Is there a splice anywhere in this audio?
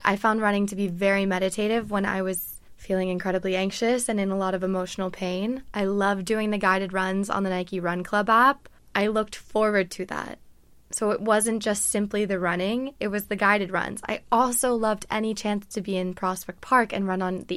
no; 0 cuts

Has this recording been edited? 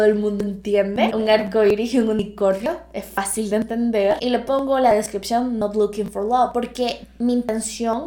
yes; 1 cut; at 1.1 s

